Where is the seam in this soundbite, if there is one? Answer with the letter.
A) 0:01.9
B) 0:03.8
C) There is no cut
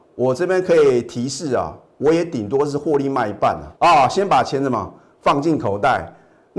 B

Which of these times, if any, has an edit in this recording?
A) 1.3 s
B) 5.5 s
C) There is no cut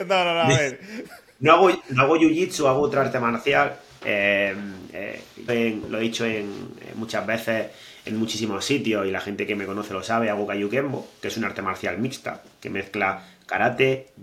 B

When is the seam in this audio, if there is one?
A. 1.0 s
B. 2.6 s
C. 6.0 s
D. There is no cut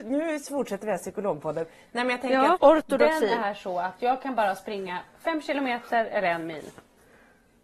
B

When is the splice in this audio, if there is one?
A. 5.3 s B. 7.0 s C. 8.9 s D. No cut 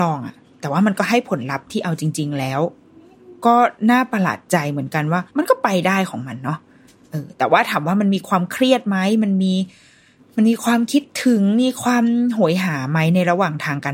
A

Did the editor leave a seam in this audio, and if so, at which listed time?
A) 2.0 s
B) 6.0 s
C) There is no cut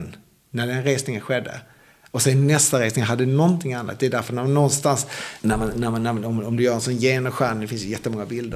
C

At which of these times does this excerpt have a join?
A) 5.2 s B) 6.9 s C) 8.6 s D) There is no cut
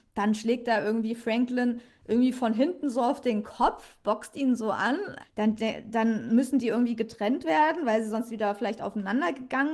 A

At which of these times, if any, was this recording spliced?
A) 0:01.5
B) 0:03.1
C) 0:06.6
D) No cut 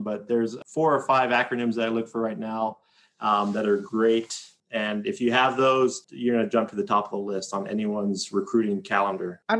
D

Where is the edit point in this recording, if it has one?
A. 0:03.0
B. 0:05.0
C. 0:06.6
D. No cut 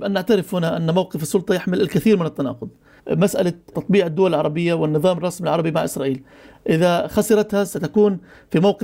A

